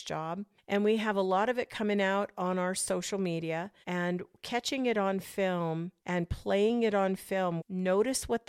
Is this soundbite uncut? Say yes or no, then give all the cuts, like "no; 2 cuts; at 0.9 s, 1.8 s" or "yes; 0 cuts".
no; 3 cuts; at 3.8 s, 6.0 s, 7.6 s